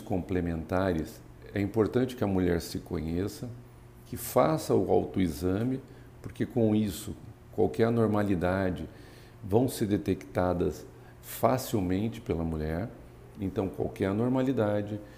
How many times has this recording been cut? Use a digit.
1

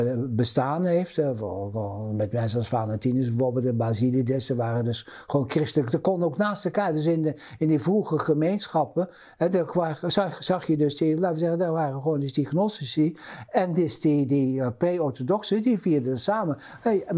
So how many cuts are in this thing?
0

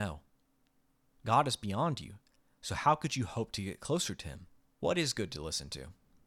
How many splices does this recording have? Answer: 1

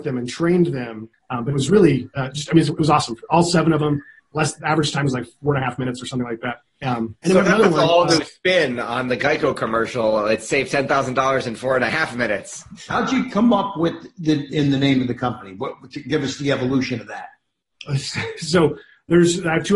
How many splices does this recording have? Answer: 2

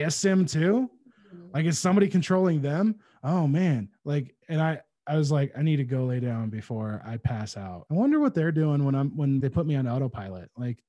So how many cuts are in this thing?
2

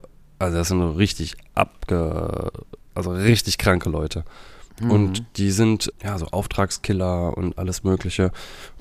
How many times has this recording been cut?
2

